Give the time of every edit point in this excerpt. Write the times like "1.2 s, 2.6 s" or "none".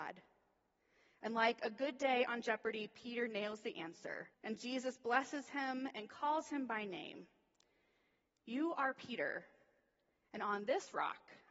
4.3 s